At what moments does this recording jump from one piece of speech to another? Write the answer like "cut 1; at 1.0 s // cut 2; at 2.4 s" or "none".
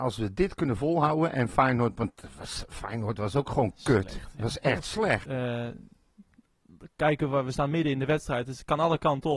cut 1; at 5.2 s

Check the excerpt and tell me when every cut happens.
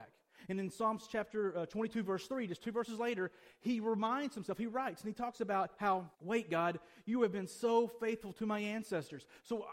cut 1; at 6.1 s

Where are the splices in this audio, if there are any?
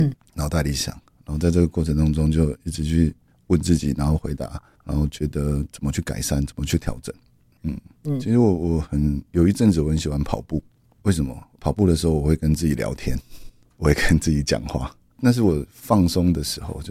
cut 1; at 7.6 s

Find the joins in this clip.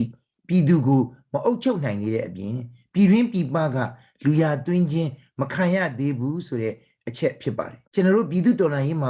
cut 1; at 7.8 s

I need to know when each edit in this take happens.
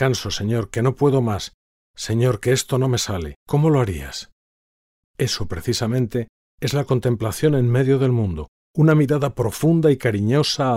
cut 1; at 3.4 s

